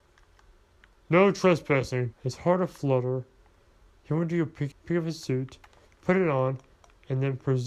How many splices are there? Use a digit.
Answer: 2